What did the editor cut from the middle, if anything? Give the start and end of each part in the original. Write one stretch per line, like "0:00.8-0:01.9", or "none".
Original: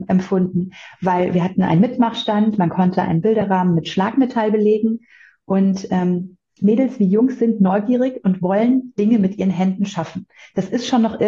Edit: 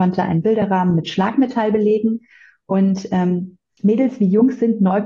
none